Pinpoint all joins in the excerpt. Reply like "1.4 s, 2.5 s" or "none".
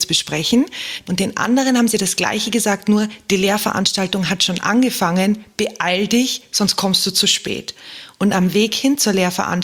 1.0 s

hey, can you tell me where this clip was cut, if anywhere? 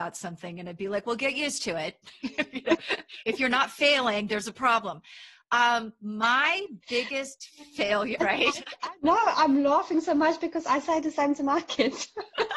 8.2 s

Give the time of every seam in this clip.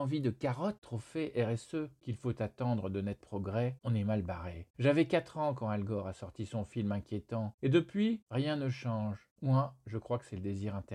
2.0 s, 9.3 s

